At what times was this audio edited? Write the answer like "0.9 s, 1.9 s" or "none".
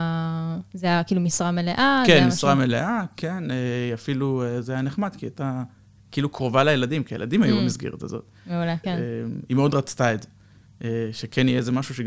8.8 s